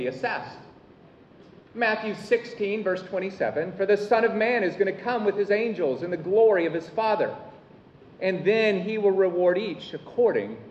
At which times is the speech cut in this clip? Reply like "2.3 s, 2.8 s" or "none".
none